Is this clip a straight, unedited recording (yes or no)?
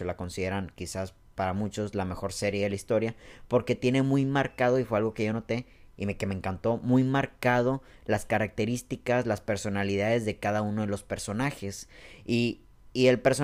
yes